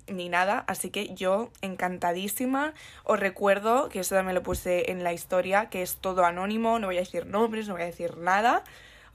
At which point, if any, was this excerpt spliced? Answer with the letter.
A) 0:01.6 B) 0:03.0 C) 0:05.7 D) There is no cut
D